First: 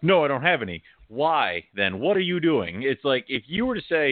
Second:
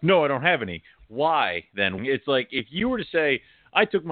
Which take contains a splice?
second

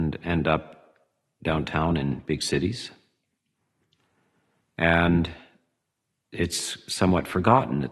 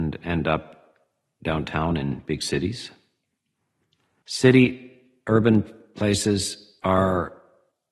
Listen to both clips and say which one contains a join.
second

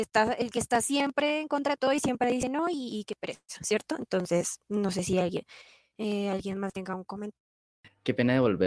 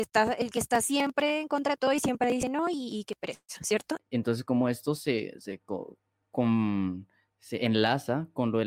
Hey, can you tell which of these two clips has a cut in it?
second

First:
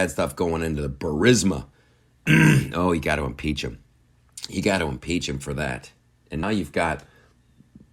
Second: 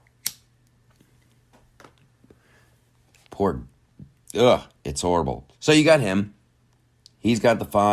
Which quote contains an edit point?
first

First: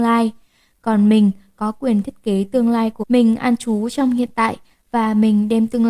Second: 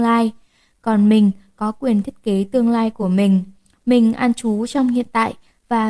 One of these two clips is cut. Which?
first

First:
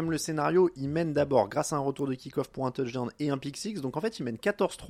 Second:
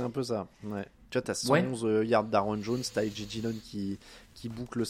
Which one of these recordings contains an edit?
second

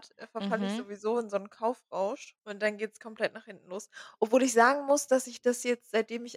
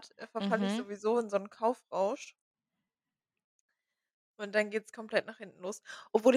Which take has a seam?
first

